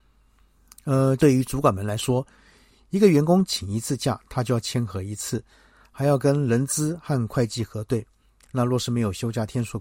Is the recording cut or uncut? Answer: cut